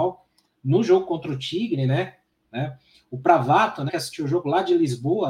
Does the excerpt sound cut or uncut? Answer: cut